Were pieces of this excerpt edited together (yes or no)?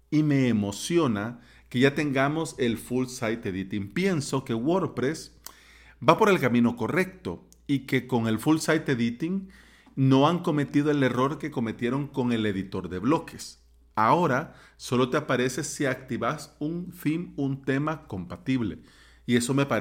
no